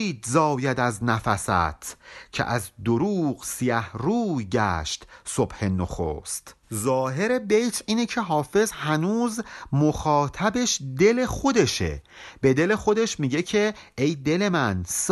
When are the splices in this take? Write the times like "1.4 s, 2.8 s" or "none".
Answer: 6.6 s